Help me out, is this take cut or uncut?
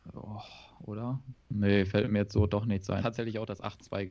cut